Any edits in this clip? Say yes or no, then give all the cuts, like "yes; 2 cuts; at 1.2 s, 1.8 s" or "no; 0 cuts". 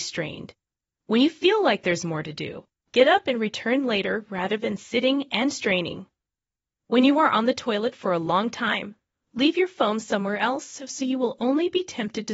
yes; 1 cut; at 2.9 s